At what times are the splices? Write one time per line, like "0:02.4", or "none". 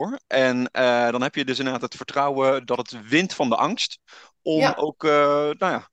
none

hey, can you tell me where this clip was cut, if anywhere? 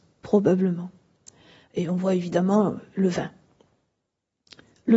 none

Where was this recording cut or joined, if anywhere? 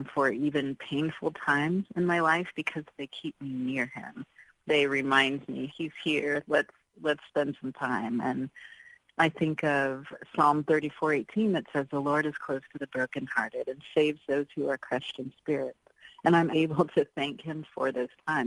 0:05.7
0:16.5

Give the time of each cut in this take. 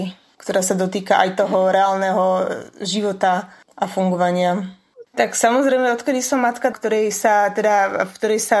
0:05.0
0:06.7

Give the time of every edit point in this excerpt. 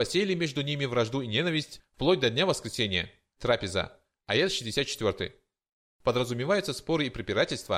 0:03.4

